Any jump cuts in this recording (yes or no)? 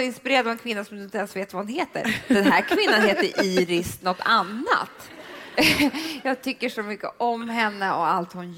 yes